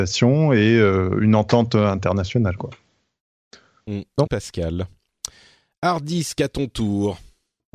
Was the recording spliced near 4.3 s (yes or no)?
yes